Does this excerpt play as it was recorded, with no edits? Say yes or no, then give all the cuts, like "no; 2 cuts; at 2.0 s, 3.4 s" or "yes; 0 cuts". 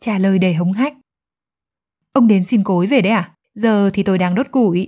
no; 1 cut; at 3.4 s